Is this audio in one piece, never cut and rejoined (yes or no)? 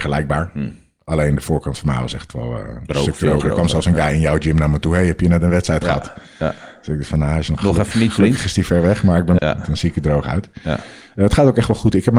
no